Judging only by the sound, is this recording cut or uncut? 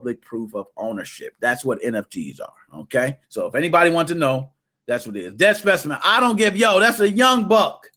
cut